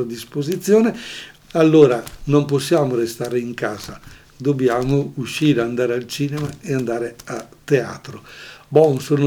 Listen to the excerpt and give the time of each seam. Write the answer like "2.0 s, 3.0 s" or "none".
1.4 s